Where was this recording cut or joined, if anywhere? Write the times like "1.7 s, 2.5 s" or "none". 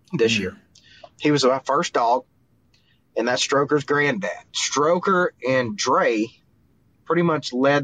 1.1 s, 4.5 s